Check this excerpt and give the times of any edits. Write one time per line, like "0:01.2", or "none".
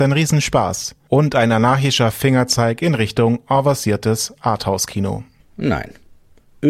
0:05.4